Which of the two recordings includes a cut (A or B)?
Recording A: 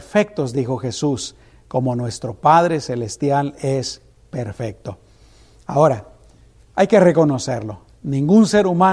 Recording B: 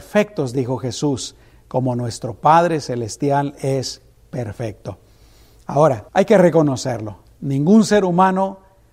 B